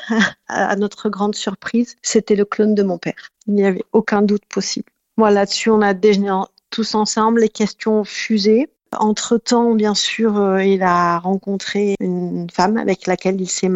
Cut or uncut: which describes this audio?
cut